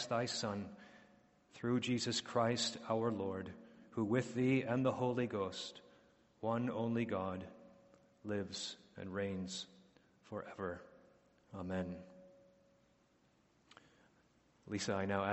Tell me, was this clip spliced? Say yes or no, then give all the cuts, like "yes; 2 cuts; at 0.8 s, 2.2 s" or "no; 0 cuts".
no; 0 cuts